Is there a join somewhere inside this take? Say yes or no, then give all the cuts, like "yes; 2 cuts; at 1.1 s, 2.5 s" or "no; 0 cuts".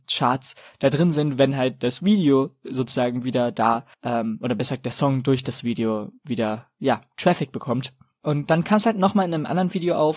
yes; 1 cut; at 3.9 s